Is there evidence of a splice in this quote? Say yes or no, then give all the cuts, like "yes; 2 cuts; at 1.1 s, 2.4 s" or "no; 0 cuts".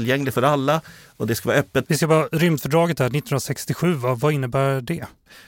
yes; 1 cut; at 1.8 s